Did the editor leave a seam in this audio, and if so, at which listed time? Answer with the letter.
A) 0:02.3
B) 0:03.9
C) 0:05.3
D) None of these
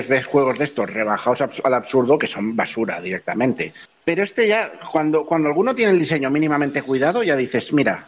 B